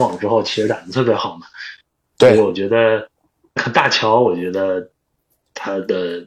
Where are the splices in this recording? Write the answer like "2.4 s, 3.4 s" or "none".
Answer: 3.6 s